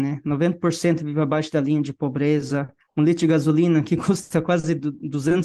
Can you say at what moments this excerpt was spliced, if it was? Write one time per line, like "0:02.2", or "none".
none